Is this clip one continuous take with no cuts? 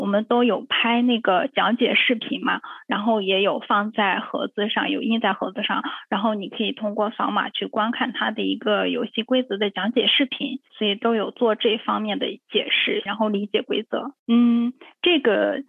no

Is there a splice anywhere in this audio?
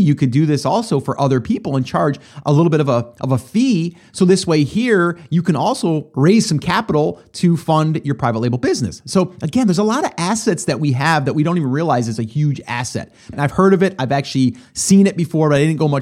yes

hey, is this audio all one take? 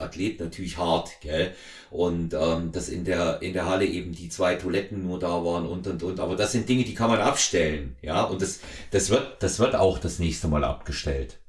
yes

